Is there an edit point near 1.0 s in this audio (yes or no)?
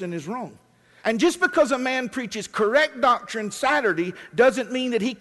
yes